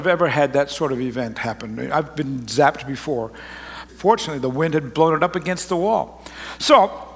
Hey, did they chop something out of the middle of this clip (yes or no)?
yes